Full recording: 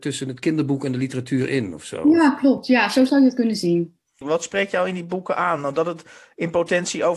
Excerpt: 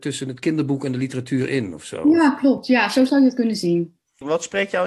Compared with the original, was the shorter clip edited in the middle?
no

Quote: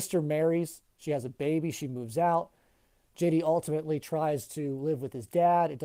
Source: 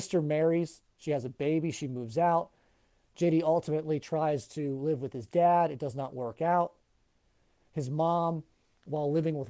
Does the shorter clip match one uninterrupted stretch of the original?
yes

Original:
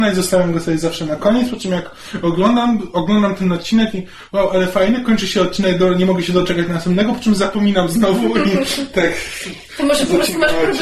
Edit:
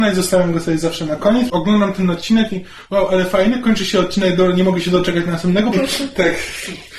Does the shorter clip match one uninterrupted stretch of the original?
no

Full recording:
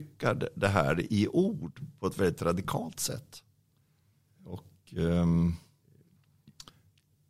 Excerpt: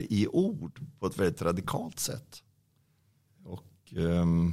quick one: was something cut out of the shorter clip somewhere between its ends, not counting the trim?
no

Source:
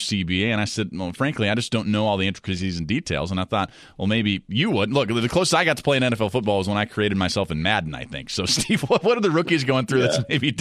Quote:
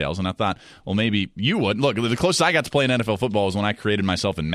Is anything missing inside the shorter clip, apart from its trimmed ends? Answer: no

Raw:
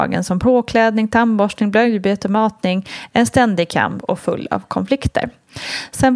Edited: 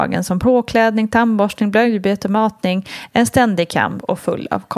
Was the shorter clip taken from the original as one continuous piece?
yes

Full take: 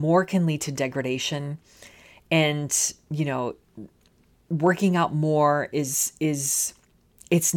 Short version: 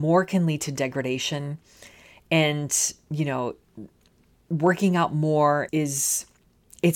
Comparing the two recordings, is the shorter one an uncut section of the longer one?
no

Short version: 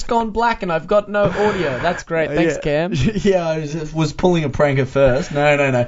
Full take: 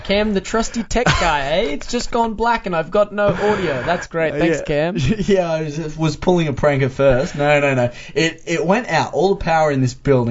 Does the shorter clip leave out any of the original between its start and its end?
no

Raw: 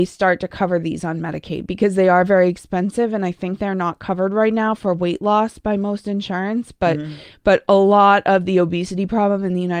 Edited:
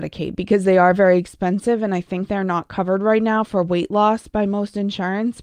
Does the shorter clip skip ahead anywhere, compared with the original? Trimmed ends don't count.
no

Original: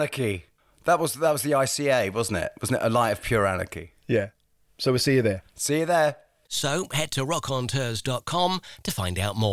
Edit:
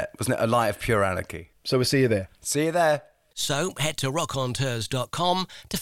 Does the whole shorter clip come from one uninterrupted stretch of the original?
no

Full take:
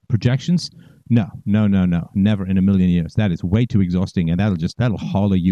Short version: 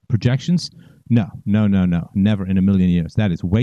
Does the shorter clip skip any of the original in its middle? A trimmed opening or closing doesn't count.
no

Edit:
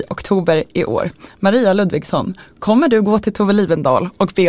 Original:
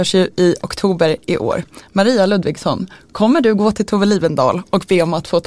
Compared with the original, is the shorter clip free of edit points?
yes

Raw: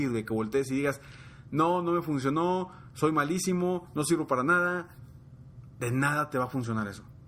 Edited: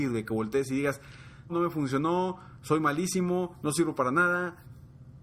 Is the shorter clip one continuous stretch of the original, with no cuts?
no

